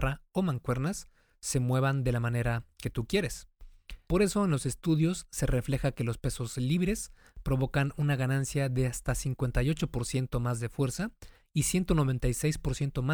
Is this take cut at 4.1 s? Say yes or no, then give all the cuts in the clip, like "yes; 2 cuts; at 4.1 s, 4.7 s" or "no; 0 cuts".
yes; 1 cut; at 4.1 s